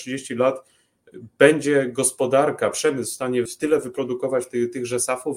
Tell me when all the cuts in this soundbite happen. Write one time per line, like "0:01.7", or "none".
0:03.5